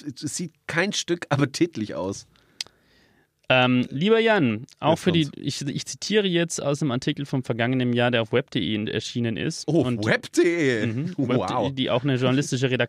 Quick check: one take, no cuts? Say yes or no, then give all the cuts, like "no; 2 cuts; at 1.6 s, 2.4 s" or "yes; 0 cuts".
yes; 0 cuts